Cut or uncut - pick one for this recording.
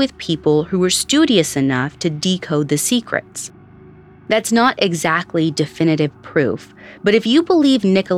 uncut